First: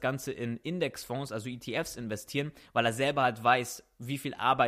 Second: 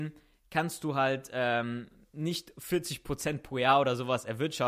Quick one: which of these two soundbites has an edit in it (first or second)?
first